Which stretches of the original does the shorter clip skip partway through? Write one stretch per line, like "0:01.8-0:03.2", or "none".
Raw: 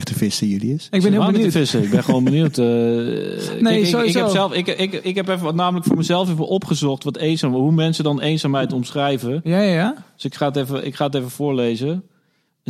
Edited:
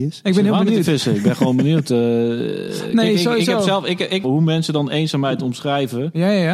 0:04.9-0:07.5